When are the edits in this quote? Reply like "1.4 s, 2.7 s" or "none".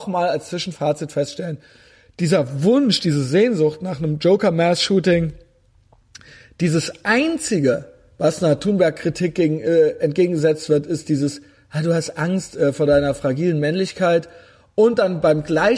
none